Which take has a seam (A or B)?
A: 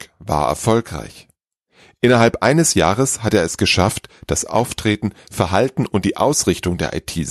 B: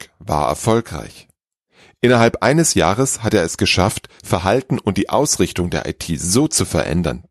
B